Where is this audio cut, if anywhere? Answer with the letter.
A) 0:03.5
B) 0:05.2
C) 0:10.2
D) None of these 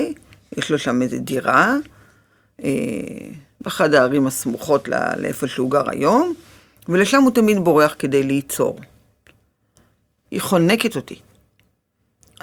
C